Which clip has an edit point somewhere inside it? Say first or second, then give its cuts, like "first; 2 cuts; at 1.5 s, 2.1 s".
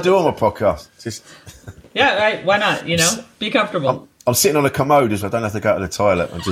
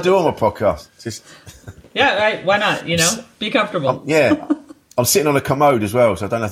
first; 2 cuts; at 4.0 s, 5.2 s